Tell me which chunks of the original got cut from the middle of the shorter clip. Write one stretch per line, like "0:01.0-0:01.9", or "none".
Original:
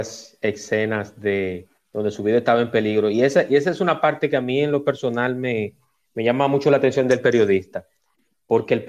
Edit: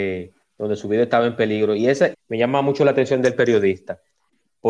0:03.5-0:06.0